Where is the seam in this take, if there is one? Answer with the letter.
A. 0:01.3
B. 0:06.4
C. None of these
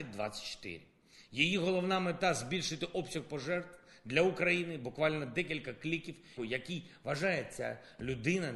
B